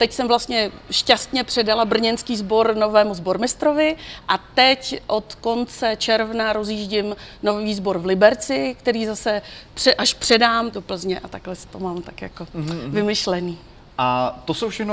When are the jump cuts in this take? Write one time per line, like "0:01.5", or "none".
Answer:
0:10.7